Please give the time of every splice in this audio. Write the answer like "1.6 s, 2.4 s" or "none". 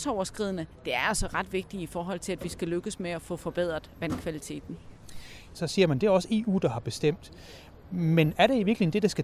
5.5 s